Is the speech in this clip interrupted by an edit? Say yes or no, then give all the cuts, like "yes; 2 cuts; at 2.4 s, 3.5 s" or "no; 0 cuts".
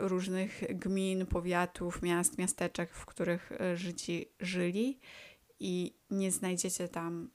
no; 0 cuts